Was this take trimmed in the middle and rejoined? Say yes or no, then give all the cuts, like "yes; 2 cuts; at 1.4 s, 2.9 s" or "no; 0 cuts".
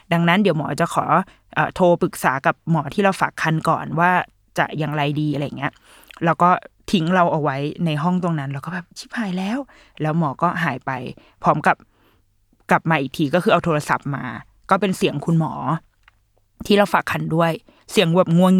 yes; 1 cut; at 2.0 s